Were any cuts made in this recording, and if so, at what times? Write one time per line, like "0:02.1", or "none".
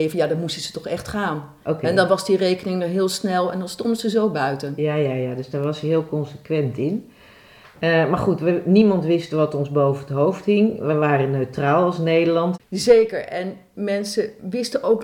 0:12.6